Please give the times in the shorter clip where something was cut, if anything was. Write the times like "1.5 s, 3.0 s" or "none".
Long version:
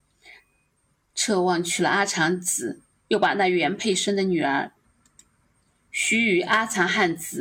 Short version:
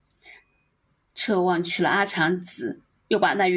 none